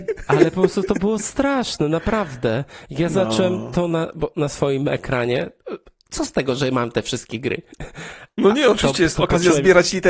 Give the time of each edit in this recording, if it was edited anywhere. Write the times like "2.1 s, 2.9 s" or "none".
none

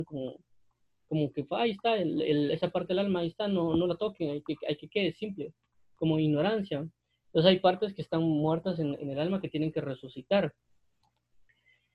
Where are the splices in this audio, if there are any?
none

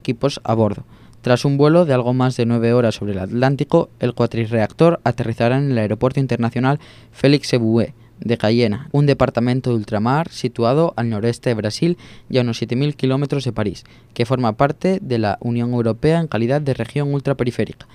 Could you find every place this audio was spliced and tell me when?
8.9 s

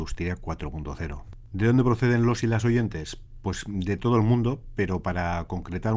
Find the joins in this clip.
none

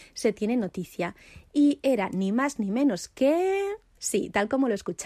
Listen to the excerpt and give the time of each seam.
4.0 s

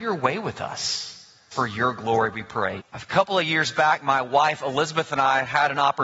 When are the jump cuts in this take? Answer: 1.5 s, 2.8 s

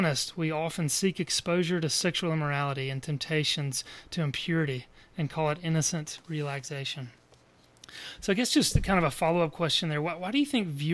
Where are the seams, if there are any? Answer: none

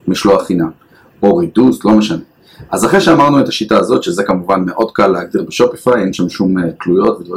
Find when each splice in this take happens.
none

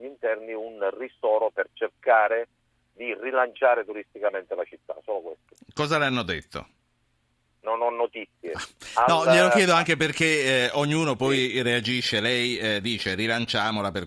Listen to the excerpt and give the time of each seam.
none

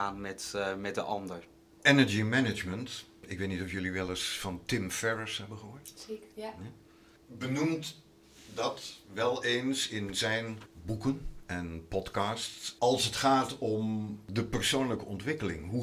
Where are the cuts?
6.3 s

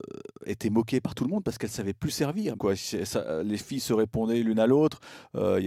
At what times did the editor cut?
2.6 s

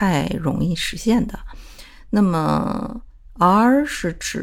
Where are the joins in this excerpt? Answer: none

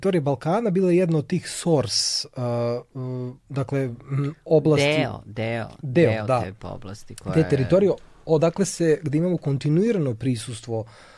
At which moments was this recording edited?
none

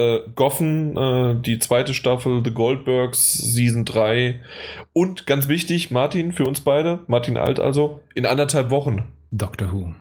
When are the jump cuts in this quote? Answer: none

